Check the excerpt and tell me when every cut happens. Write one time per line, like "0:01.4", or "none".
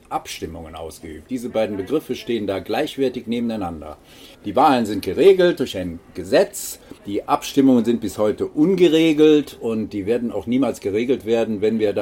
0:04.3
0:07.0